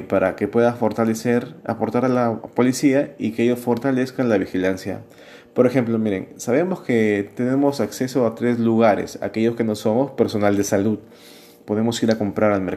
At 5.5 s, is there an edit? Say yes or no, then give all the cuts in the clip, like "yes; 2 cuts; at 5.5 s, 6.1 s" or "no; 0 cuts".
no; 0 cuts